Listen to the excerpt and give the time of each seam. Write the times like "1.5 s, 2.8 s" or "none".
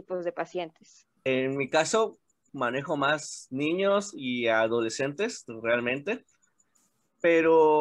1.2 s, 2.5 s